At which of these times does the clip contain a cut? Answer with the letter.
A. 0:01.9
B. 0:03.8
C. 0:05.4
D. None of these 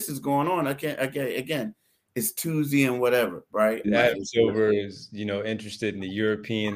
B